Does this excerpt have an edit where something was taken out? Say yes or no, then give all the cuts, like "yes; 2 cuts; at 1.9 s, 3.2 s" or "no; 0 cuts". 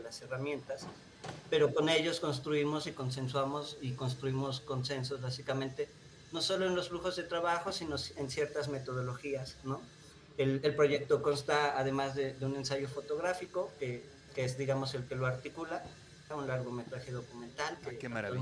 yes; 2 cuts; at 14.3 s, 16.3 s